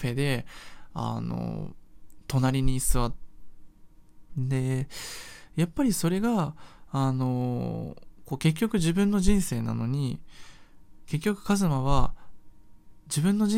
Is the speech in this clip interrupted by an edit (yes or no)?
yes